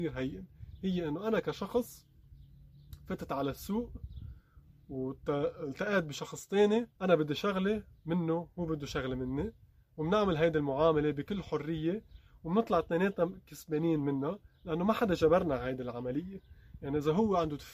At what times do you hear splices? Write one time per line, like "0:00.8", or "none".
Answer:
0:07.0